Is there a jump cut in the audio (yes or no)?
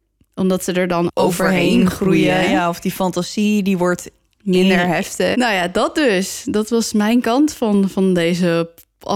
yes